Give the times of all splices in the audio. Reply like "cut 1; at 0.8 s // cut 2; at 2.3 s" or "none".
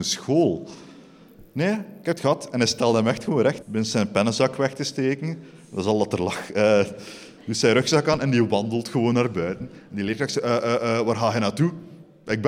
cut 1; at 3.6 s